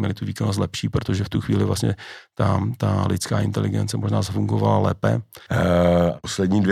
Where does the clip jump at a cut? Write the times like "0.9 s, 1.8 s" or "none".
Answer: 5.5 s